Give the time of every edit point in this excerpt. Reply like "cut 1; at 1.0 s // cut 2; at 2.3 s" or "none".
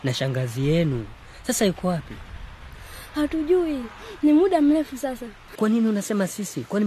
cut 1; at 5.5 s